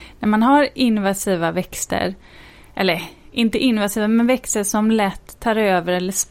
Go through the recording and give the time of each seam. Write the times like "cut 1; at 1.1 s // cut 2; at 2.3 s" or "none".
none